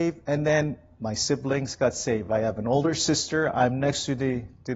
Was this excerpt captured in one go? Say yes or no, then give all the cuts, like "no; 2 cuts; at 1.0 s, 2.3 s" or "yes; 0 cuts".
yes; 0 cuts